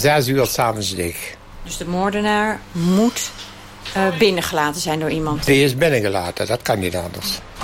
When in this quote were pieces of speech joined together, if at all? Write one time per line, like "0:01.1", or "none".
none

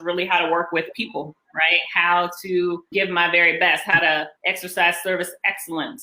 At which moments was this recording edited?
0:02.9
0:04.4

